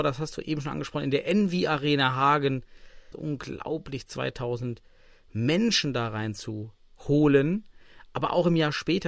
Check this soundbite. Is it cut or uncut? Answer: cut